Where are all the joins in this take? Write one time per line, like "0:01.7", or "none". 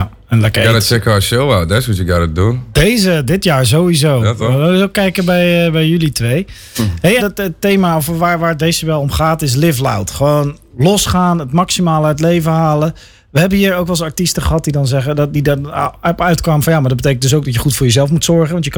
0:07.2